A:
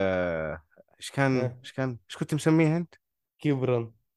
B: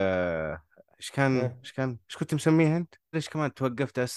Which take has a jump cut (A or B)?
B